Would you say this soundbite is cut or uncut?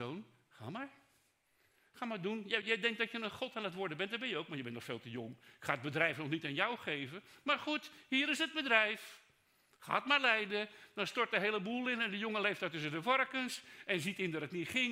uncut